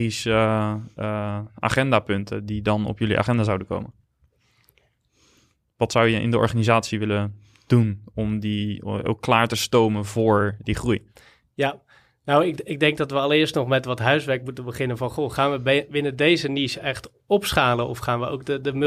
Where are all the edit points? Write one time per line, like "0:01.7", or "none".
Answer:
none